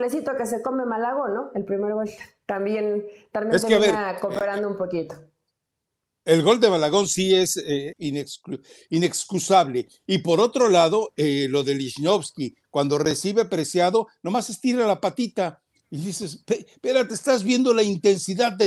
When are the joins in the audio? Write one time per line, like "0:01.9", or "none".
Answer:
0:07.9